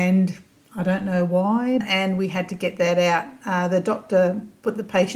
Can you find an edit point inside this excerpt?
yes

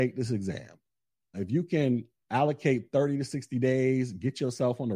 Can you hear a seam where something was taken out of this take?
yes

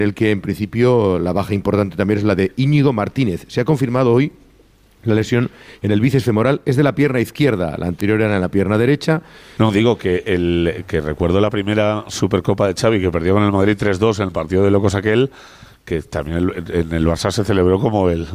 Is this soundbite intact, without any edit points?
no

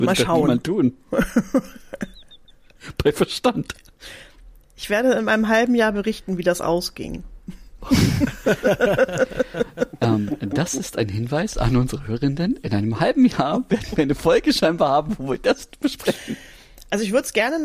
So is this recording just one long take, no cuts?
yes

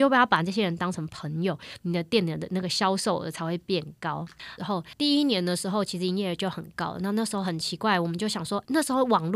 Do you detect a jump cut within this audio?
yes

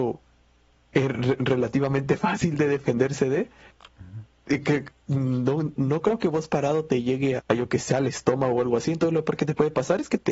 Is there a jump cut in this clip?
yes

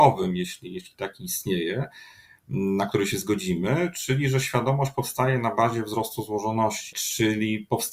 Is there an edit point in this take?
yes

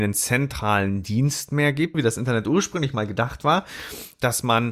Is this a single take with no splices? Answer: no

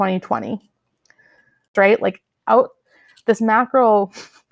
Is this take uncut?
no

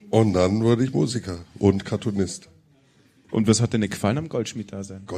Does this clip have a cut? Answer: no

